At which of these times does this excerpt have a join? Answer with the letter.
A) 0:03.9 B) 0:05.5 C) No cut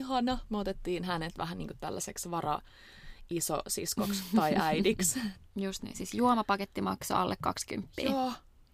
B